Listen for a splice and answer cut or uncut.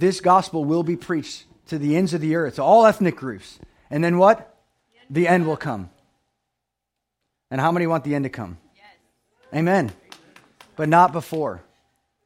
uncut